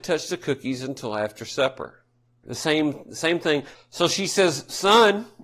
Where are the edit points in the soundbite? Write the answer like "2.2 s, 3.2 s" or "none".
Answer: 2.4 s, 3.7 s